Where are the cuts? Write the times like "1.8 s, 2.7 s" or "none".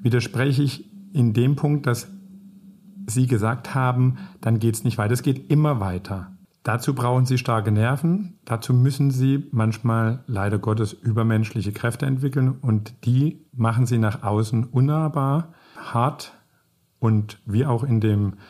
6.4 s, 13.5 s, 15.8 s

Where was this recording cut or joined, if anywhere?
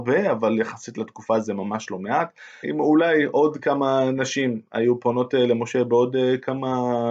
2.6 s

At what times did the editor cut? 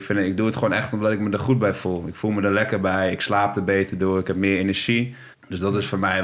5.3 s

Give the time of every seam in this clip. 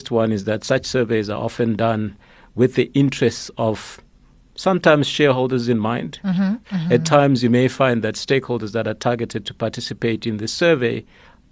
6.6 s

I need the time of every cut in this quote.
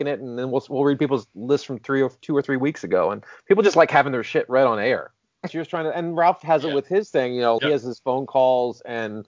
5.5 s, 7.6 s

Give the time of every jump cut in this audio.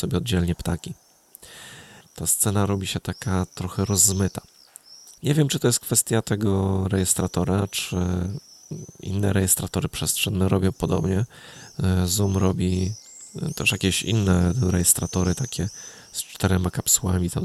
2.0 s, 5.2 s

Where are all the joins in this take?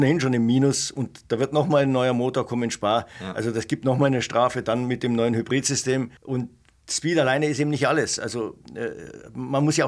6.2 s

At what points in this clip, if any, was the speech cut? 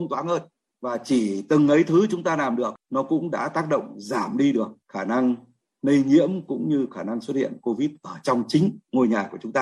none

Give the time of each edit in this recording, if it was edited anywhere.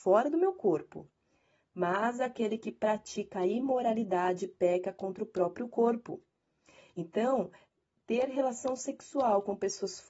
none

